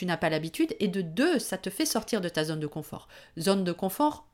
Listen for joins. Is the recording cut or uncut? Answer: uncut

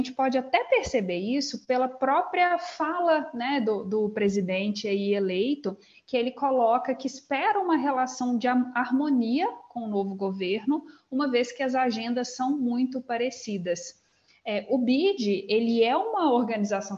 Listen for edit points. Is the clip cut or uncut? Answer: uncut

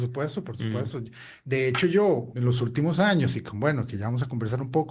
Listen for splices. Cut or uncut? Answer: cut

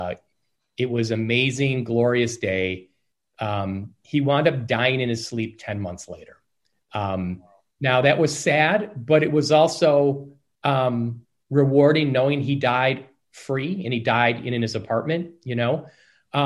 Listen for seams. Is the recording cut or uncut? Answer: uncut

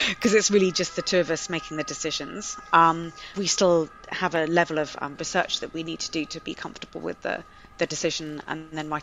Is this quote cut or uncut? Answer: cut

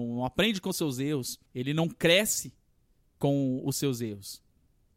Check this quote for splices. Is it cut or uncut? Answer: cut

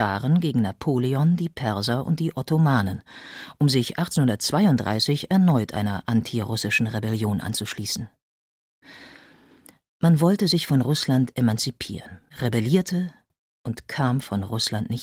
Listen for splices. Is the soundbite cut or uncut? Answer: cut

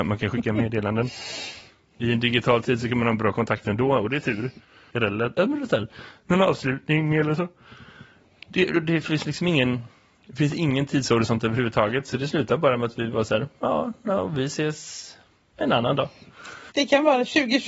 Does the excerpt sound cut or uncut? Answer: cut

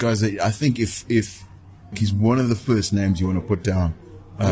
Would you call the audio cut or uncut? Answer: cut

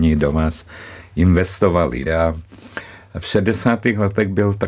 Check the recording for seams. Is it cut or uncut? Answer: cut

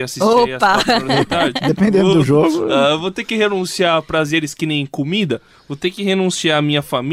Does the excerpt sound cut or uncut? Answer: uncut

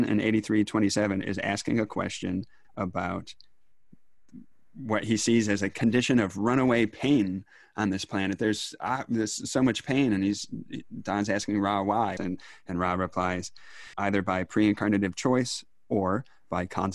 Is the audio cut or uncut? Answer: cut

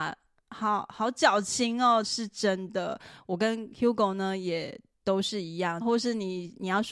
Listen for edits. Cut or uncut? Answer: cut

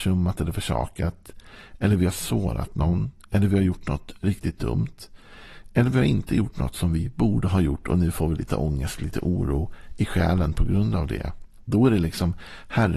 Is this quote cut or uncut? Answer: uncut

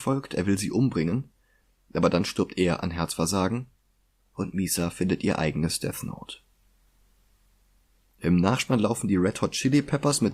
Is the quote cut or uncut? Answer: uncut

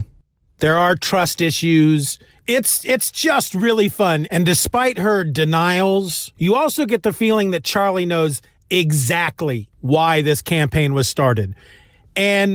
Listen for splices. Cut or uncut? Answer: cut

